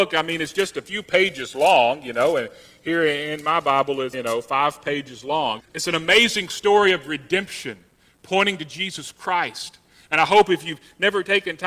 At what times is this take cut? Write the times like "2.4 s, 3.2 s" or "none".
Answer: 4.1 s, 5.6 s